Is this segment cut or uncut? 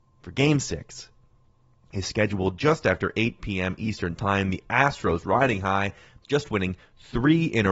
uncut